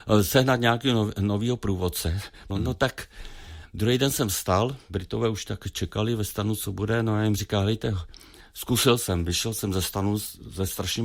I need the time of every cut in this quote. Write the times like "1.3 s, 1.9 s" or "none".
2.5 s